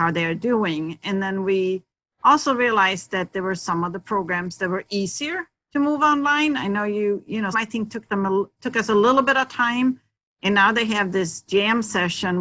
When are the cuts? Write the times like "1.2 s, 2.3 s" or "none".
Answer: 7.5 s